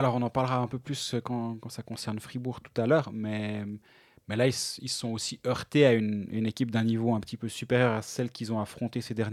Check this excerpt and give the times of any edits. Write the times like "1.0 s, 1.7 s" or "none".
none